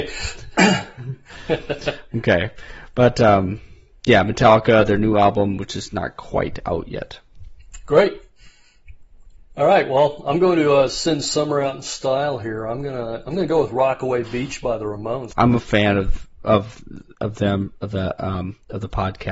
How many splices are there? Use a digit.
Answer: 1